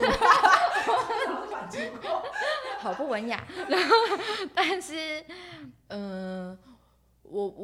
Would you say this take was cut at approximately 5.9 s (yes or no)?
yes